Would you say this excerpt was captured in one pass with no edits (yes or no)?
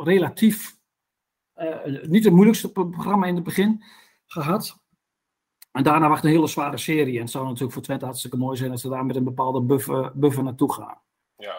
yes